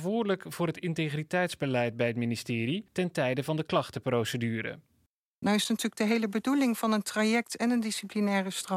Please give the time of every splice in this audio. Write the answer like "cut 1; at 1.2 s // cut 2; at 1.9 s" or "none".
cut 1; at 5.4 s